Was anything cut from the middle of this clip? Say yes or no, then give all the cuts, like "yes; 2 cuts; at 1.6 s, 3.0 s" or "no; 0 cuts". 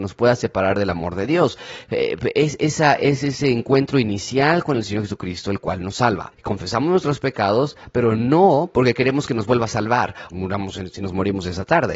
yes; 2 cuts; at 6.3 s, 10.3 s